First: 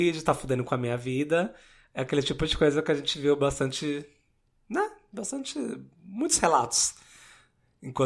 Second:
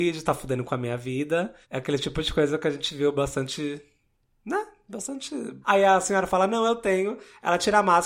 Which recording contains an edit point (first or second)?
second